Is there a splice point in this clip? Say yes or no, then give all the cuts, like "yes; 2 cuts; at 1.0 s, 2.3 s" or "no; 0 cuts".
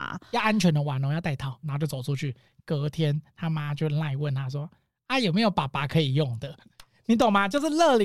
yes; 1 cut; at 1.6 s